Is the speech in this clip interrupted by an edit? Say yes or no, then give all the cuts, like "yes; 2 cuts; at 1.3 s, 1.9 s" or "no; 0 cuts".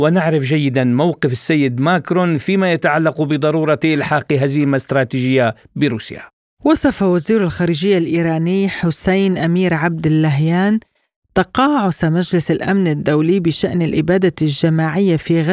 no; 0 cuts